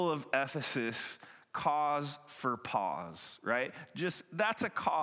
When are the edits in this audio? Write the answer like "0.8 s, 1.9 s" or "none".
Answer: none